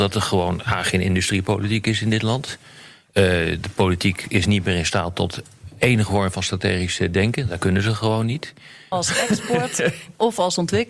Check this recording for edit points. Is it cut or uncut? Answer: cut